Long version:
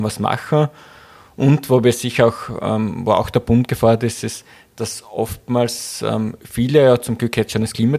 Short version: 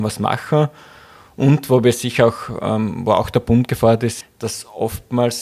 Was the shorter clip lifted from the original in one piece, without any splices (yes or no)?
no